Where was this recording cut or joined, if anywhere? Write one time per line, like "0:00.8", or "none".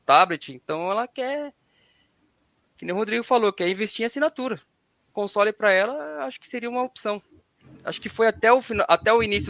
none

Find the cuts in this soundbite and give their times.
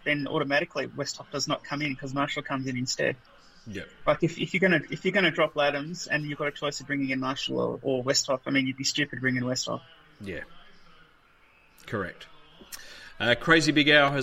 none

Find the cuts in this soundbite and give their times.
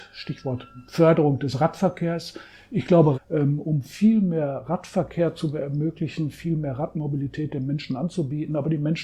0:03.1

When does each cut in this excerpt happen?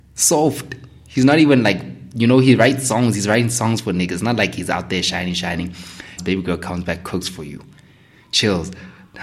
0:06.2

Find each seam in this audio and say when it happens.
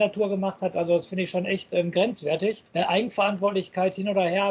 0:02.7

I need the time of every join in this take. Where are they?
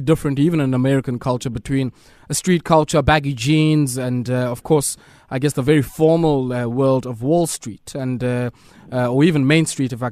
none

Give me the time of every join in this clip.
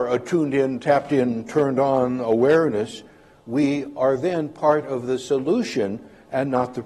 none

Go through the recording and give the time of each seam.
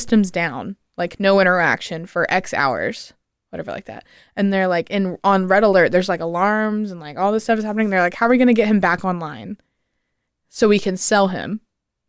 none

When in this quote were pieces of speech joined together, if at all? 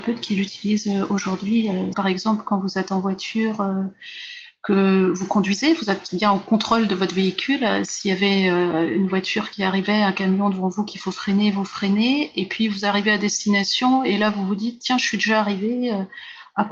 0:01.9

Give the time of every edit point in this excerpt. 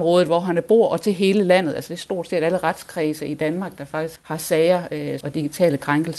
0:04.2
0:05.2

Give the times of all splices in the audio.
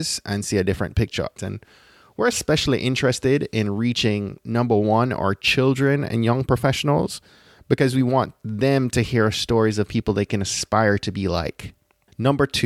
0:01.4

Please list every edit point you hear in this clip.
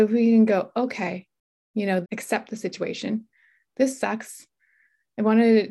0:02.0

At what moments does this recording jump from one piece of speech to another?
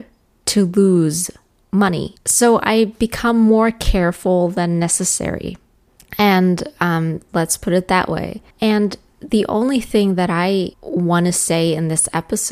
0:07.3
0:08.5
0:10.7

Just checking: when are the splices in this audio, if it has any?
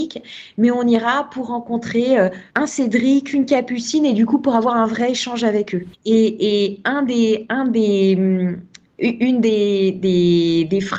0:02.5
0:05.9

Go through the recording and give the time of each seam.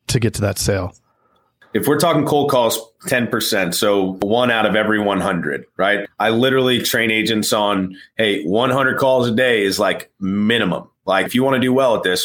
none

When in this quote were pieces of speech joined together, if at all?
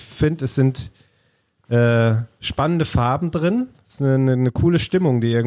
none

